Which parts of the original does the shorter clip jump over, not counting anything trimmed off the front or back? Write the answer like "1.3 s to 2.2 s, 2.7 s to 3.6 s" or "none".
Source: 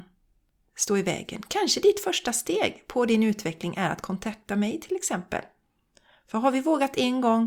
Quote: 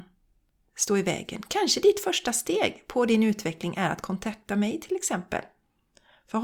none